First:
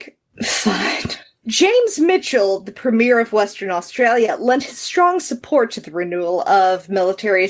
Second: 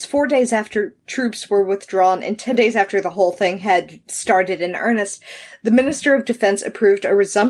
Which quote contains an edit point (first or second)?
first